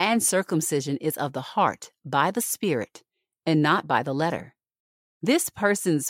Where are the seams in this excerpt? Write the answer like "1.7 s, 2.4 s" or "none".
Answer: none